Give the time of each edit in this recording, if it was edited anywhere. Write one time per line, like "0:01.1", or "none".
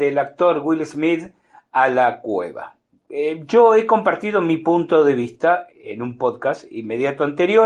0:05.7

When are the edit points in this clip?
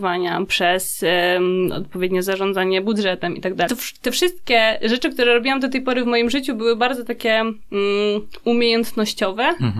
0:03.7

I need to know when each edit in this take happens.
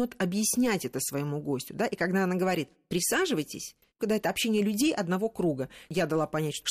0:04.0

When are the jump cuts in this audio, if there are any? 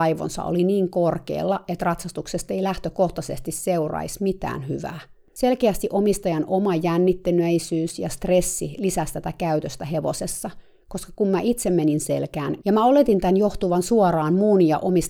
0:05.3
0:12.6

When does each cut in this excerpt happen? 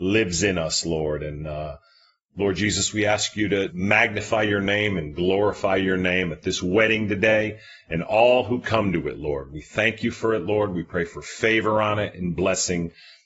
0:03.7

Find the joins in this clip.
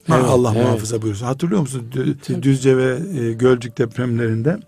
0:02.2

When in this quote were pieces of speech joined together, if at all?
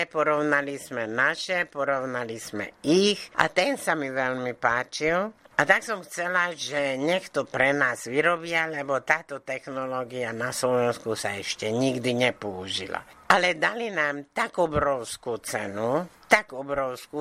0:03.3

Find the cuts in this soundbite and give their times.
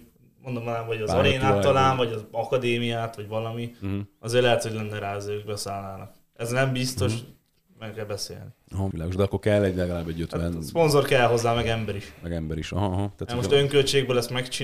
0:08.9

